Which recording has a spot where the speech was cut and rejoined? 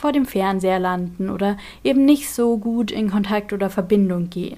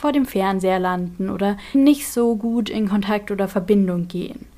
second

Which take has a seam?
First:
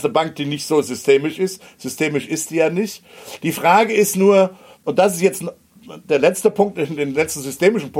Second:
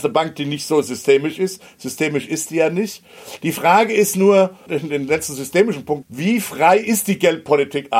second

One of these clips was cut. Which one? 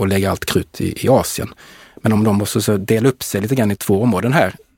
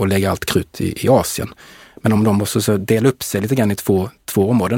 first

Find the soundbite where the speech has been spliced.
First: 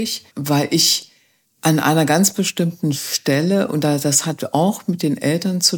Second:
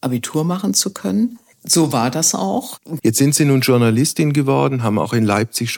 second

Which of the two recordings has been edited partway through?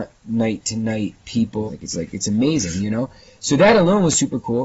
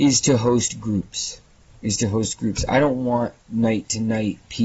first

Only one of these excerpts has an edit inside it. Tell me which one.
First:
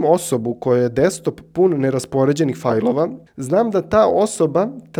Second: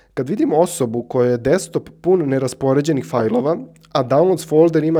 first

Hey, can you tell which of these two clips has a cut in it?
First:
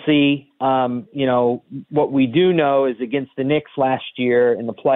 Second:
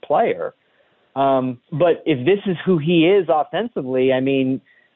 second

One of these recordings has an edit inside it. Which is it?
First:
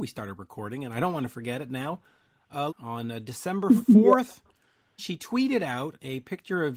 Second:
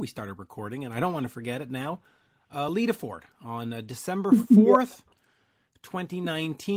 first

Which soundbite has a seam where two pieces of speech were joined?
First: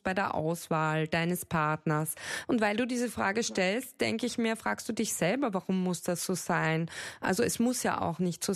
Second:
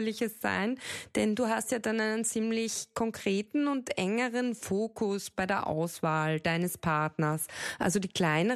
first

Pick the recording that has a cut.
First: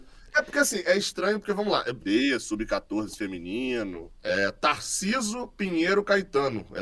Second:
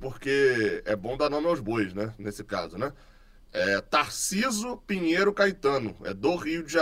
first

